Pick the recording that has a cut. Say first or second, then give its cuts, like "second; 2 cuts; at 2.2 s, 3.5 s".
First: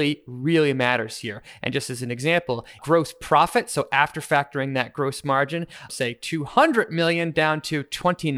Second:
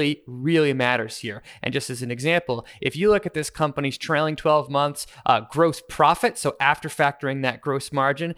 first; 2 cuts; at 2.8 s, 5.9 s